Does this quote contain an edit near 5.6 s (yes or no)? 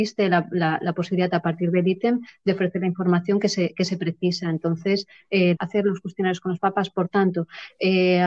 yes